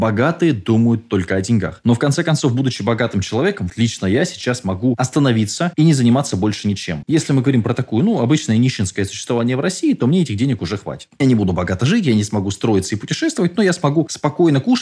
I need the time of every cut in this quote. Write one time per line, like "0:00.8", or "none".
0:03.7
0:07.0